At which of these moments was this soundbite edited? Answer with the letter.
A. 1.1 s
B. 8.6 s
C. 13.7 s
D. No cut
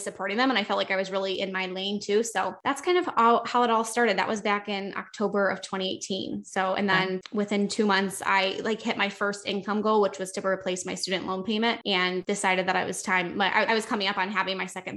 C